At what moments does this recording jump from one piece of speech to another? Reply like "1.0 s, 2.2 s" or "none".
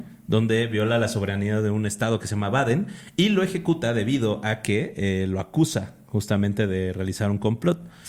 none